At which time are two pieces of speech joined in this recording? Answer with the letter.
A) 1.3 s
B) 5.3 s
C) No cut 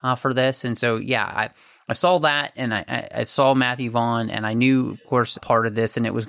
B